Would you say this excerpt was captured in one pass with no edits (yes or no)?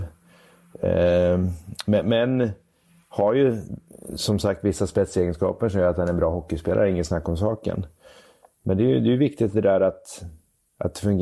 yes